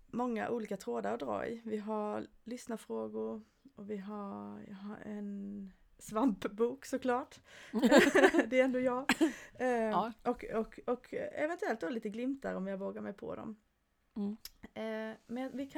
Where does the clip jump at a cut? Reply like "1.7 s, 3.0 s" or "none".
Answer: none